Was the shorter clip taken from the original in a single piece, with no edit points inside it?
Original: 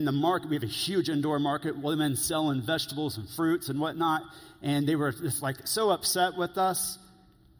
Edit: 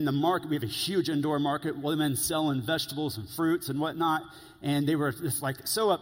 yes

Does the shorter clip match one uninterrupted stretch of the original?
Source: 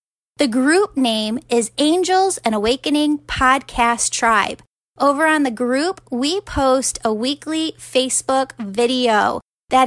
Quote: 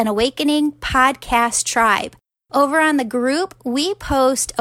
yes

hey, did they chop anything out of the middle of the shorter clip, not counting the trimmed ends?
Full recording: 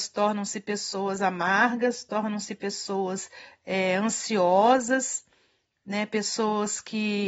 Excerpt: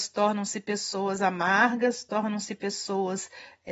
no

